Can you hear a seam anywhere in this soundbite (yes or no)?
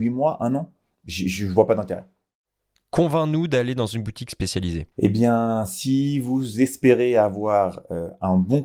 yes